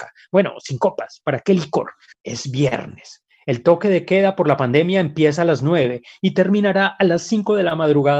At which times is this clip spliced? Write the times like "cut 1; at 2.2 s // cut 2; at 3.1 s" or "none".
cut 1; at 2.1 s